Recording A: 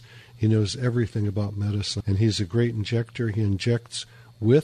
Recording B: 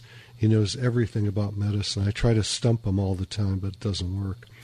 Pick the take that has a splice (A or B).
A